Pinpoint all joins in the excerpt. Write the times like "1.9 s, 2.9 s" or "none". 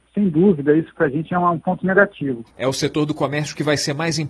2.5 s